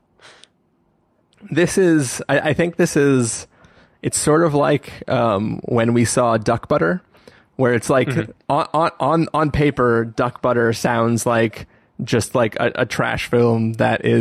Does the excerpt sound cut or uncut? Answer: uncut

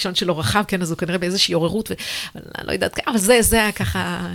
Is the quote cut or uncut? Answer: uncut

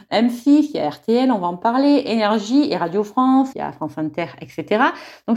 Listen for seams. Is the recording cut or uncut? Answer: cut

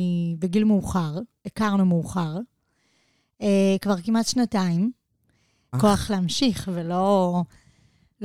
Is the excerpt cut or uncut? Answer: cut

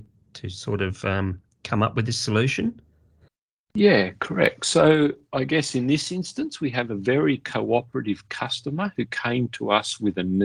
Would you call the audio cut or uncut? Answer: uncut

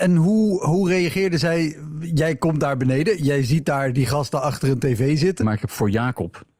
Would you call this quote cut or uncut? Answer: cut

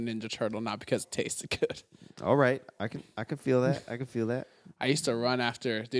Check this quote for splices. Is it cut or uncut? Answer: uncut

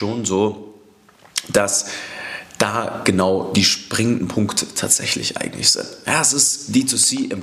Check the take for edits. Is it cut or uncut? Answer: uncut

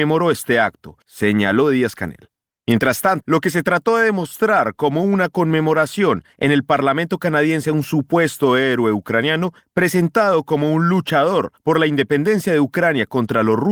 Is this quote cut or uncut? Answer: cut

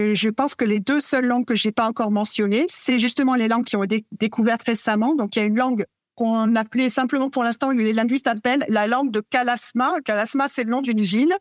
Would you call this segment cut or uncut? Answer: uncut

